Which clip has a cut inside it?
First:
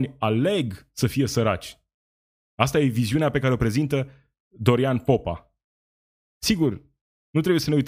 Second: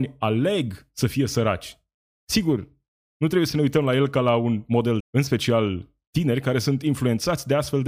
second; 2 cuts; at 2.1 s, 5.0 s

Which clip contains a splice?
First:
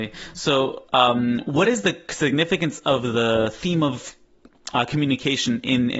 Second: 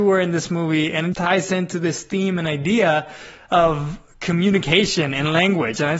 second; 1 cut; at 1.1 s

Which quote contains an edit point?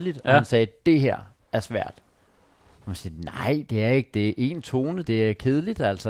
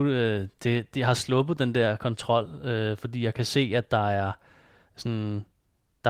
first; 1 cut; at 5.0 s

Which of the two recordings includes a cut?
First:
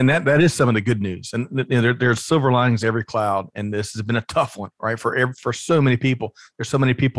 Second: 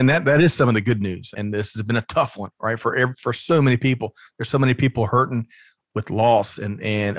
second; 1 cut; at 1.3 s

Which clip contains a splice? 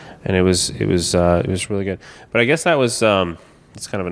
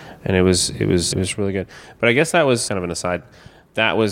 second; 2 cuts; at 1.1 s, 2.7 s

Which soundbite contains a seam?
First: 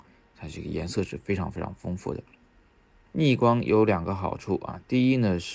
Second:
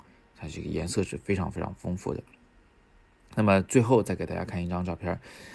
first; 1 cut; at 3.1 s

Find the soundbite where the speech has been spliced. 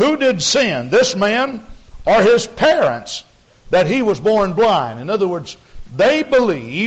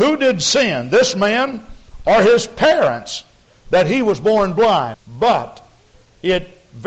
second; 1 cut; at 4.9 s

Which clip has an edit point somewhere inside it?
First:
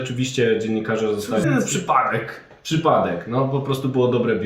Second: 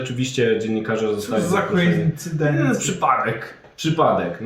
first; 1 cut; at 1.4 s

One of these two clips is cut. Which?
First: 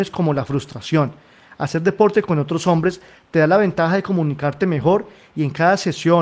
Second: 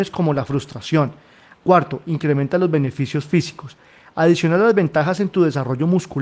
second; 1 cut; at 1.5 s

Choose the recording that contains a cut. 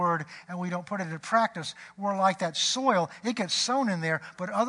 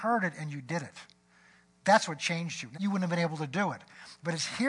second; 1 cut; at 2.7 s

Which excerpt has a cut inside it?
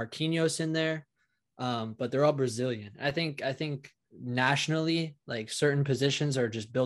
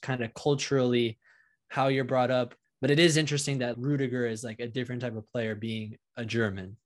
second; 2 cuts; at 2.6 s, 3.7 s

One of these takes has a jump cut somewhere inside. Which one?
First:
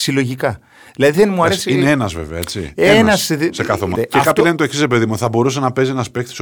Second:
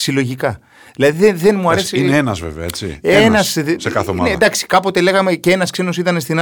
first; 2 cuts; at 1.1 s, 3.9 s

